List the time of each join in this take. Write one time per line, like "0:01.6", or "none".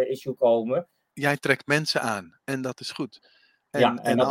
0:01.1